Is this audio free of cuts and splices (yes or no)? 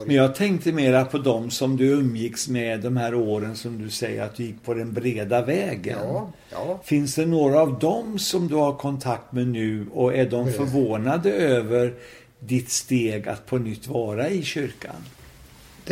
yes